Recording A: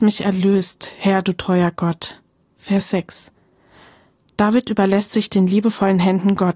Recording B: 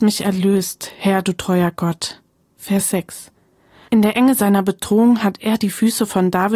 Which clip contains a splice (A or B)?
B